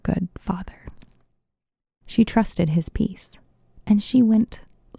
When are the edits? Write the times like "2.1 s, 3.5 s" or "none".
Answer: 3.8 s